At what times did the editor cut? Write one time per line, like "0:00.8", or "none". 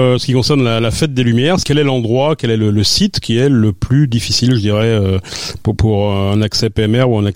none

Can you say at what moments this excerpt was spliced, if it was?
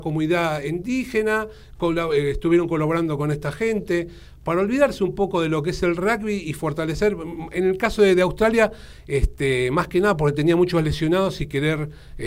none

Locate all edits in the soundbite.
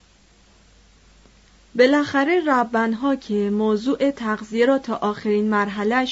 none

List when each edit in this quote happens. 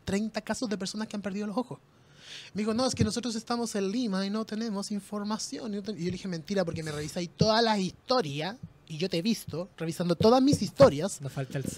0:09.7

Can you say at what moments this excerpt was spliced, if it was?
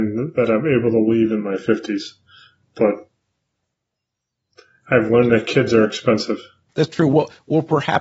0:06.7

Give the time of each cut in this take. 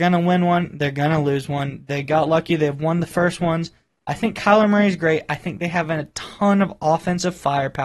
none

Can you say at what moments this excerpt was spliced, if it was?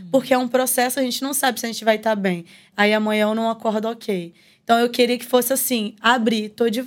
0:02.7

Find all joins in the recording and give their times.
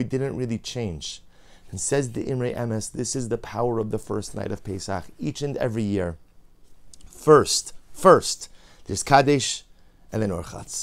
none

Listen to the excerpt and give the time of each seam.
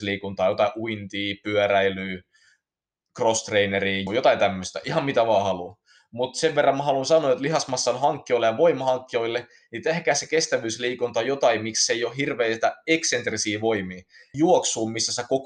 0:04.1
0:14.3

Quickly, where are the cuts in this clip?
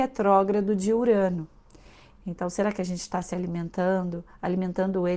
0:02.1

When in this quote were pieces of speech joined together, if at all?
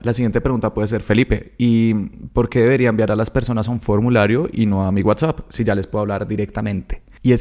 none

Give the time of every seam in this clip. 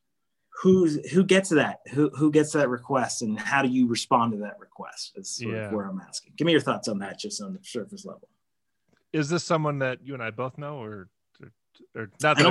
none

